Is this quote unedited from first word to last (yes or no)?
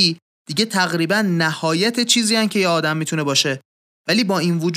yes